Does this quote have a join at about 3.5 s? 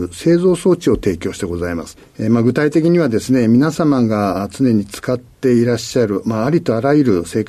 no; 1 cut; at 2.0 s

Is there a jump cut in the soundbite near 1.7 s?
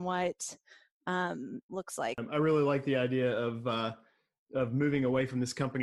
yes; 1 cut; at 1.7 s

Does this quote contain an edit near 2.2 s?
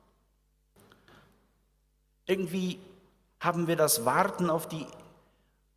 no; 0 cuts

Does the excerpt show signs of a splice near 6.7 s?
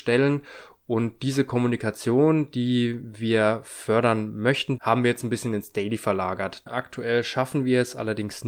yes; 2 cuts; at 4.8 s, 6.7 s

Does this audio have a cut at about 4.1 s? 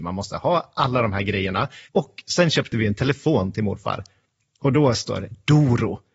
no; 1 cut; at 1.8 s

